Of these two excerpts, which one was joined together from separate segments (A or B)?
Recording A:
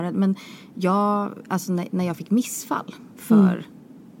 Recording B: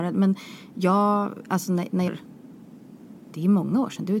B